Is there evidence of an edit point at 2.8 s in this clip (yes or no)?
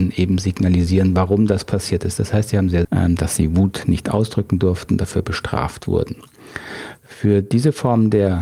yes